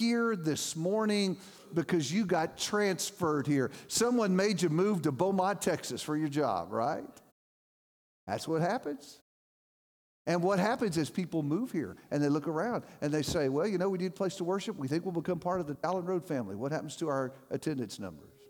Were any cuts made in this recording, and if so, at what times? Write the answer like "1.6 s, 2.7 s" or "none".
none